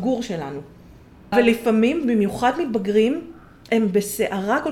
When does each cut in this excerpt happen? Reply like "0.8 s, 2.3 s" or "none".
1.3 s